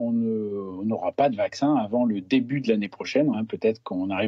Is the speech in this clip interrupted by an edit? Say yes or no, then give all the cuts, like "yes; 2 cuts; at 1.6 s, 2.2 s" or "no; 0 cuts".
yes; 1 cut; at 3.3 s